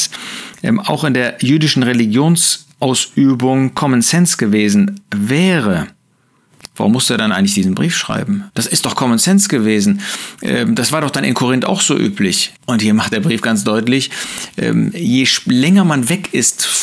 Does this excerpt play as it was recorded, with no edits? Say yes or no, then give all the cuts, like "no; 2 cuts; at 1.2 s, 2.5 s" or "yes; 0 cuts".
no; 2 cuts; at 8.5 s, 12.6 s